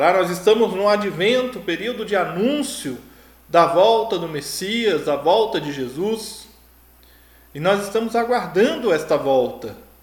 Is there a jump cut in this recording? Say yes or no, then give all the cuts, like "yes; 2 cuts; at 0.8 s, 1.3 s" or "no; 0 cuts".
no; 0 cuts